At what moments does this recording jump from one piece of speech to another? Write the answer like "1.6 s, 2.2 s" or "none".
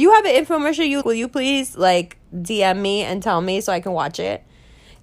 1.0 s, 2.2 s